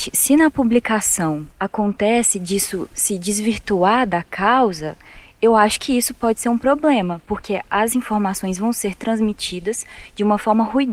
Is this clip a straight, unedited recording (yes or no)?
no